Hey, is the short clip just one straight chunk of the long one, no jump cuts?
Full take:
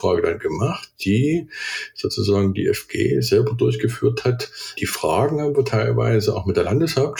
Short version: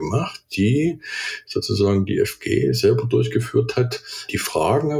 yes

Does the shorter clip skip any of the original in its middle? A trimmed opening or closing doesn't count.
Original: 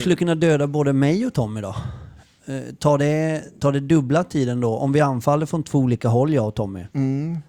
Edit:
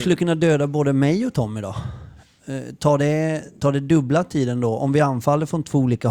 no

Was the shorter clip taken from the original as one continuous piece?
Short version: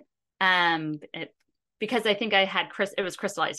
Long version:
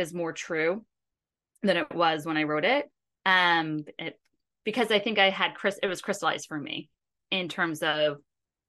yes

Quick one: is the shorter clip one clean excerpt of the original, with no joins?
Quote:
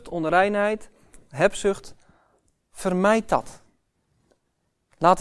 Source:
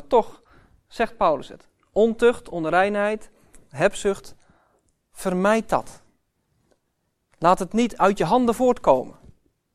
yes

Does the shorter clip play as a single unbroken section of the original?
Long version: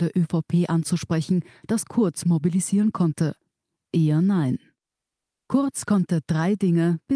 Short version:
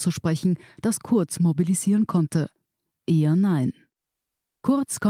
yes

